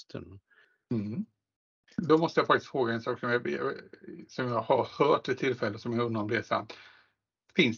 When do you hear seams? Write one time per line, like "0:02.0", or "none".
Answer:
none